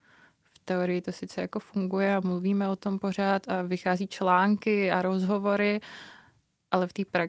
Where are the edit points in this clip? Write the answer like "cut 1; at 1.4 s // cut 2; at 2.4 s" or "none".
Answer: none